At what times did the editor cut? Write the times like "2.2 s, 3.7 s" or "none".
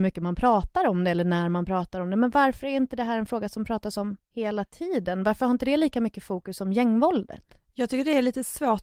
none